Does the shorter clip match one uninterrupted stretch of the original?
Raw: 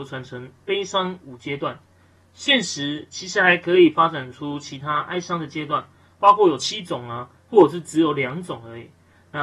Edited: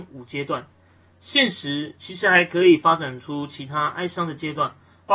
yes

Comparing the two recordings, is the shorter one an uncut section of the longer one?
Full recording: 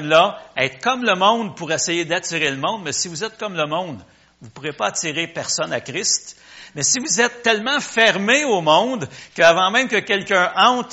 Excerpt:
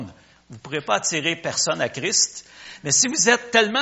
yes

